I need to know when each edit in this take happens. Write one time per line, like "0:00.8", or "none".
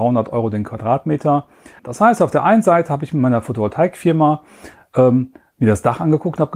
0:01.8